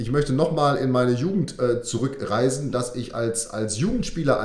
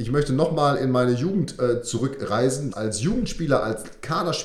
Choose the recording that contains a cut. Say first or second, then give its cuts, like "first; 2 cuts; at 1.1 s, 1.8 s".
second; 1 cut; at 2.7 s